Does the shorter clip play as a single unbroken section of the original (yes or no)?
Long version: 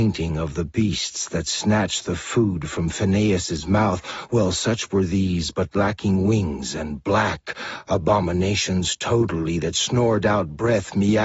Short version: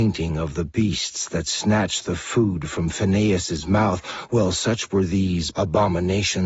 no